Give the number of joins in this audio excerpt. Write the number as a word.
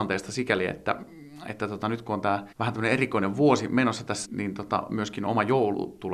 two